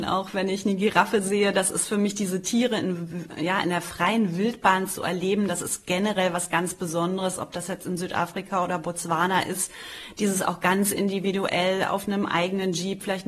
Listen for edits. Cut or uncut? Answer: uncut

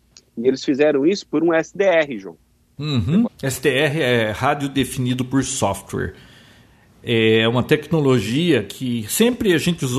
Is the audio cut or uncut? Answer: cut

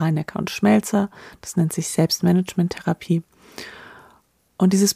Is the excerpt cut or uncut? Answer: uncut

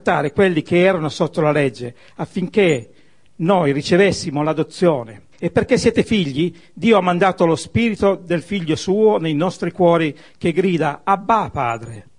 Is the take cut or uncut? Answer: cut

